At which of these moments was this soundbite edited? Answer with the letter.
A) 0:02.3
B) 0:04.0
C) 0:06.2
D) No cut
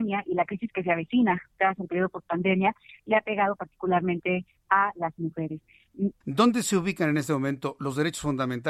C